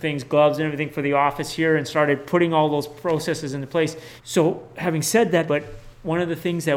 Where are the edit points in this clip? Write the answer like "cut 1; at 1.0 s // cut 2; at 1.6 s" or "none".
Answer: cut 1; at 4.2 s // cut 2; at 5.5 s